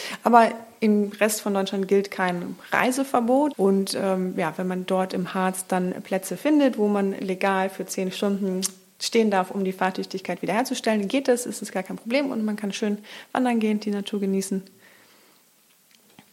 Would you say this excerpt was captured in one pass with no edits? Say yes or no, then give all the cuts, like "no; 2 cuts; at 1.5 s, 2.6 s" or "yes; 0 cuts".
no; 1 cut; at 3.5 s